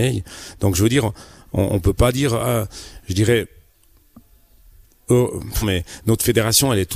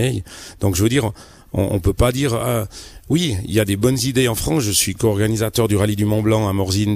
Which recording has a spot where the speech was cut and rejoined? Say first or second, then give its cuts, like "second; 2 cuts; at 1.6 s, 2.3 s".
first; 2 cuts; at 3.0 s, 5.6 s